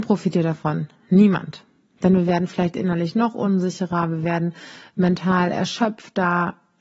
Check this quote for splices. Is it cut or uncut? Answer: uncut